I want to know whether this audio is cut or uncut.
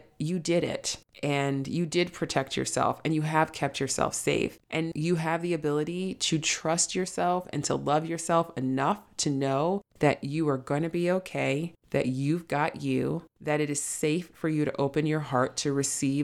cut